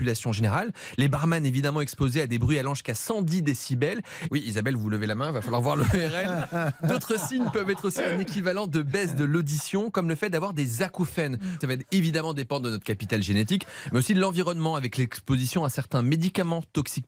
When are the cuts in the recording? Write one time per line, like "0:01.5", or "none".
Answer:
0:04.3
0:11.6